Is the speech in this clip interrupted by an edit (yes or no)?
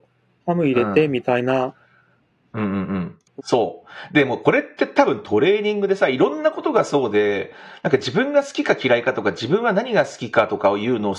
yes